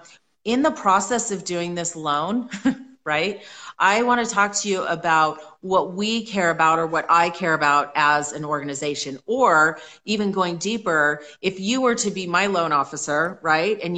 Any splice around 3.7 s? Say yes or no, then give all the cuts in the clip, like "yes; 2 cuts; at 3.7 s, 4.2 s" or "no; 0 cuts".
no; 0 cuts